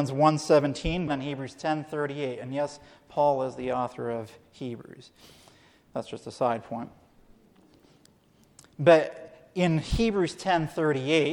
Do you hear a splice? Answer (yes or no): yes